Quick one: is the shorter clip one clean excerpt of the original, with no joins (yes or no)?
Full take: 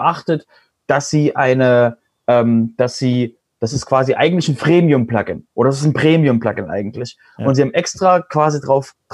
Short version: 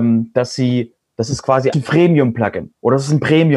no